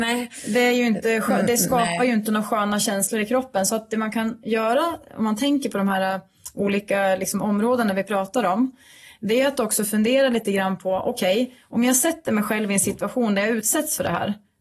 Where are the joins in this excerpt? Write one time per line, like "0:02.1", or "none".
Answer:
none